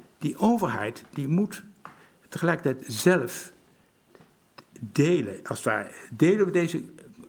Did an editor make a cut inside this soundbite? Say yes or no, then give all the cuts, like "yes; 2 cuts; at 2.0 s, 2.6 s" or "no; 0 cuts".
no; 0 cuts